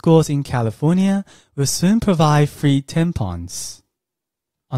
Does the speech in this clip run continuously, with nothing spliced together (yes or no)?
yes